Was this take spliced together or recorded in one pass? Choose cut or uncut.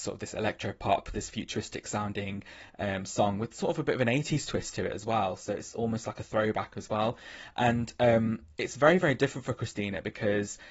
uncut